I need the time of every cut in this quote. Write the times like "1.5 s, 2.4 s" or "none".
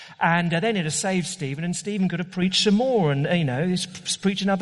none